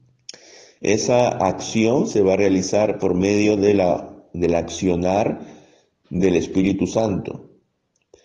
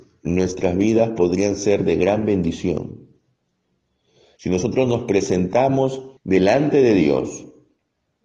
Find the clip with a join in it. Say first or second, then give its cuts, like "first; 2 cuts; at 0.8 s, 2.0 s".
second; 2 cuts; at 4.4 s, 6.2 s